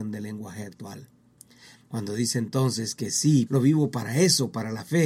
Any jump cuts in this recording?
yes; 2 cuts; at 1.7 s, 3.5 s

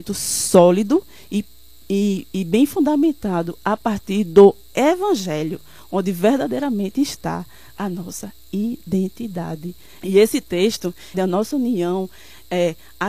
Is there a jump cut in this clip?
yes; 2 cuts; at 10.0 s, 11.1 s

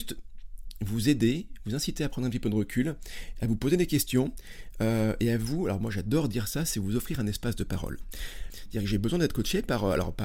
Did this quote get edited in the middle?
yes; 1 cut; at 8.5 s

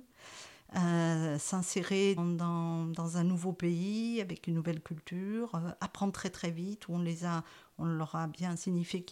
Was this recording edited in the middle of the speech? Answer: yes; 1 cut; at 2.2 s

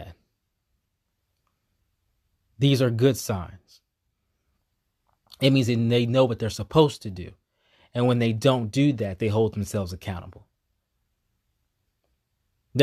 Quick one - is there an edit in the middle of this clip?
no; 0 cuts

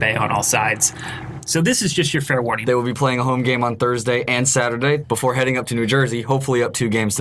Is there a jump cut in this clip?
yes; 2 cuts; at 2.6 s, 5.0 s

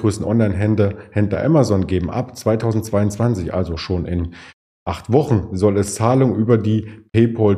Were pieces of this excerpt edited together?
no; 0 cuts

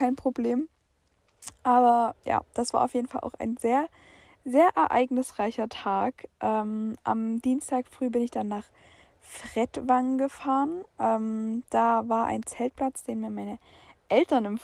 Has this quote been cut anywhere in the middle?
no; 0 cuts

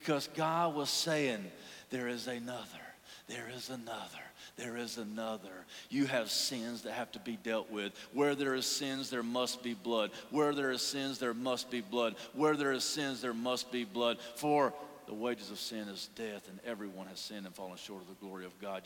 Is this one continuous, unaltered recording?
yes; 0 cuts

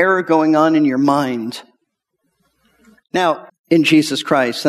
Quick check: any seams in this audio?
yes; 1 cut; at 3.5 s

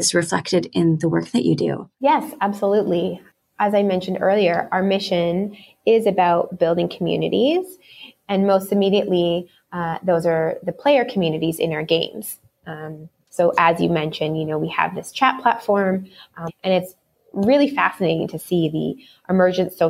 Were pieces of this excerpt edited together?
yes; 2 cuts; at 13.2 s, 16.5 s

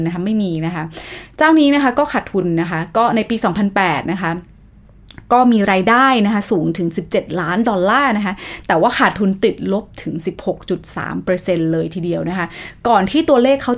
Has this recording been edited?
no; 0 cuts

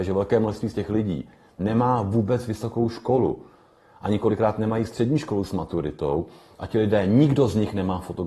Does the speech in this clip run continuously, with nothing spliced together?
yes; 0 cuts

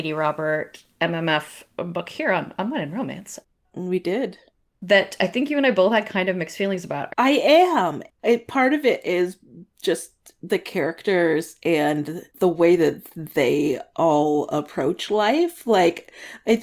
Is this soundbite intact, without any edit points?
no; 2 cuts; at 7.1 s, 12.3 s

